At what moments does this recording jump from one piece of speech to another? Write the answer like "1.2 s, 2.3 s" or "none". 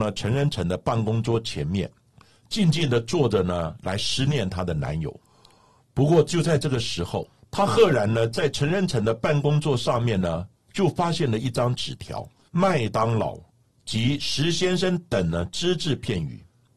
7.5 s, 12.5 s